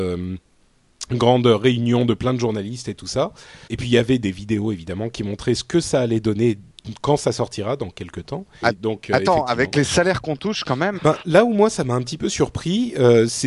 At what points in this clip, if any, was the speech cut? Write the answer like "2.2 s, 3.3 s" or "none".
3.7 s, 8.6 s, 11.0 s

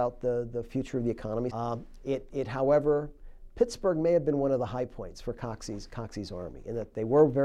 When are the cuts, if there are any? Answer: 1.5 s

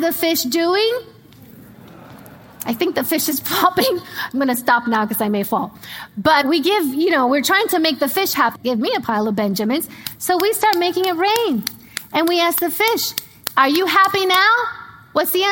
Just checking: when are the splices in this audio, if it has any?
6.4 s, 8.5 s

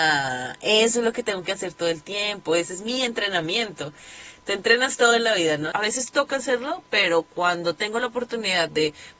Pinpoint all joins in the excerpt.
5.7 s

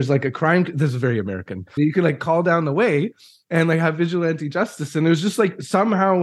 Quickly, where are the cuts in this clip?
1.8 s

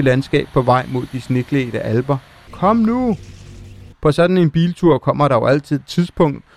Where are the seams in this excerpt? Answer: 2.5 s, 3.9 s

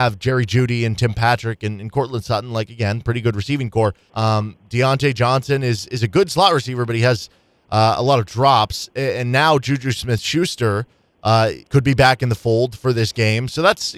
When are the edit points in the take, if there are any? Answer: 4.1 s, 11.6 s

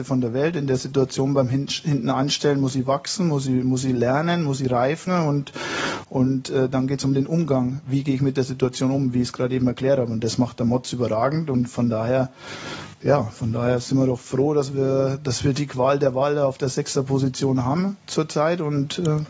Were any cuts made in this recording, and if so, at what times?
none

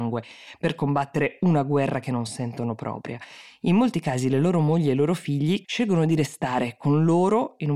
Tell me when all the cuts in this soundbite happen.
5.6 s

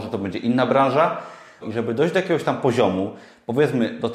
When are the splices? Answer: 1.6 s

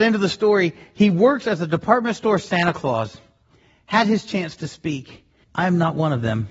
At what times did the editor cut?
5.4 s

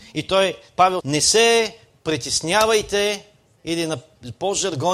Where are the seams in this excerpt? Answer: 1.0 s

